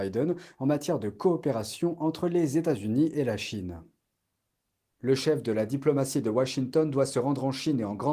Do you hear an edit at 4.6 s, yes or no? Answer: no